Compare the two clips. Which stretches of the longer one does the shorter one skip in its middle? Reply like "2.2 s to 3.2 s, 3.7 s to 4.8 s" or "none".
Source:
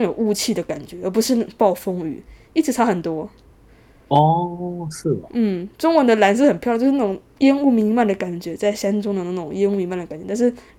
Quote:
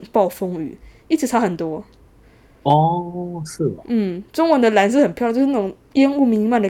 none